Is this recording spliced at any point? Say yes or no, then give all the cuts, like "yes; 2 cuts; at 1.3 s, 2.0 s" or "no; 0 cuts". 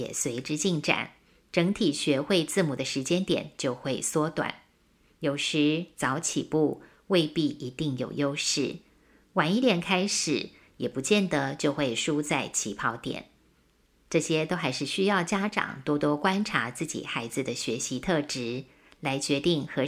no; 0 cuts